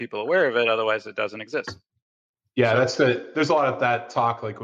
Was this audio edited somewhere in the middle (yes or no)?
no